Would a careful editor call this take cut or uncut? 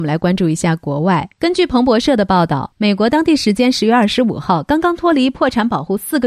uncut